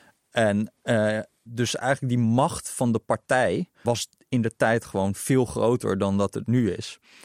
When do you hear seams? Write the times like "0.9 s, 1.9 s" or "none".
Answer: 1.5 s, 3.8 s